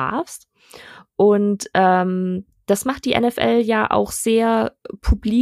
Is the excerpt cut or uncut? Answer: uncut